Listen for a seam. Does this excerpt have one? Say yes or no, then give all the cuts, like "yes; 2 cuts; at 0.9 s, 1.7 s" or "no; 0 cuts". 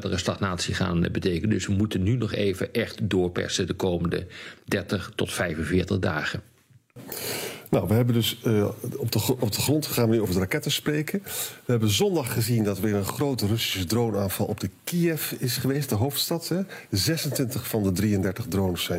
no; 0 cuts